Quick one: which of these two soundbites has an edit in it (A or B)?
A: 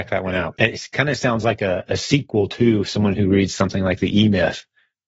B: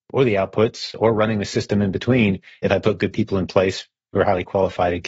A